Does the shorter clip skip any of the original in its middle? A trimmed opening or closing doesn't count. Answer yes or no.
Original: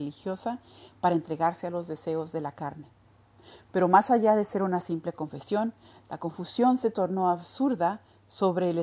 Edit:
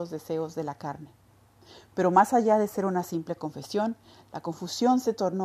no